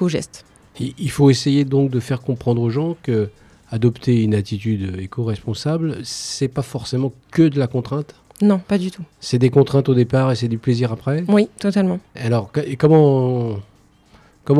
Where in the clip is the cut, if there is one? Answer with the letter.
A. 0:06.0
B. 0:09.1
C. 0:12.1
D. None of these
C